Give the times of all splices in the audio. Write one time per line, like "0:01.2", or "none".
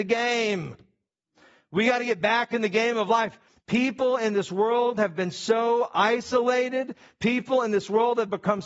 0:03.5